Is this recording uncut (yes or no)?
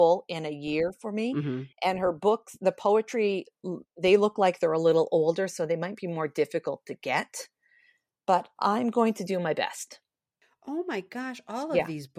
yes